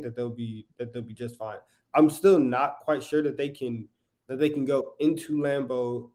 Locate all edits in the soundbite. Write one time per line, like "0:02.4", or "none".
none